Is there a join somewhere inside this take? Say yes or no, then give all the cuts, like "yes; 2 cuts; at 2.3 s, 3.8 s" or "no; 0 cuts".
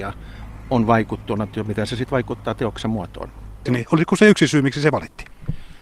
yes; 1 cut; at 3.7 s